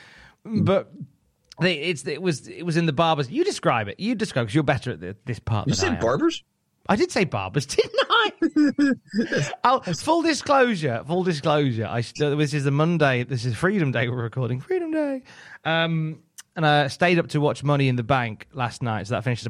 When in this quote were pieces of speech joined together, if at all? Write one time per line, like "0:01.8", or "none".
none